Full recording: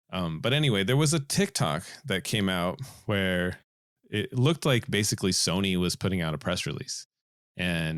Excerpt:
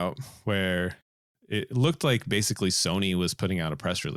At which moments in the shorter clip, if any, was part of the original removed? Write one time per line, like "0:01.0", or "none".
none